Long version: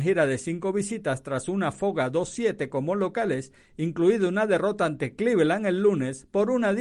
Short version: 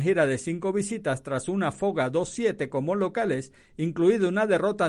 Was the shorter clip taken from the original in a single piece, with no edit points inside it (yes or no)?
yes